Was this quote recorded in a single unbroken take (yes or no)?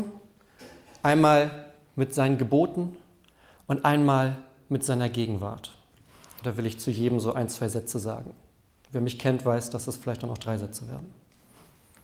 yes